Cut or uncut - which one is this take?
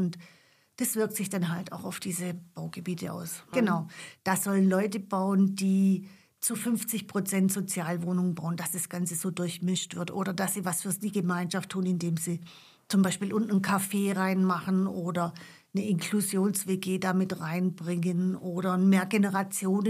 cut